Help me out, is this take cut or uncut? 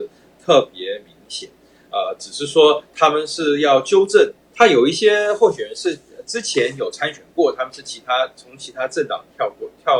cut